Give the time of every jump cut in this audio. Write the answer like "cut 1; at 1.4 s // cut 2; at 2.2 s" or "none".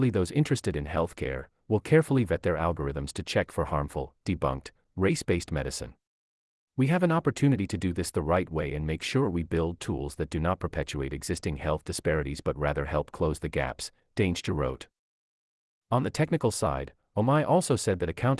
cut 1; at 6.6 s // cut 2; at 15.7 s